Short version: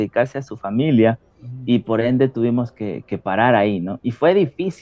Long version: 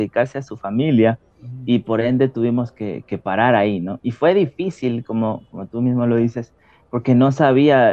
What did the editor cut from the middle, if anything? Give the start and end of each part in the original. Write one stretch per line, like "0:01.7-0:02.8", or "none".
none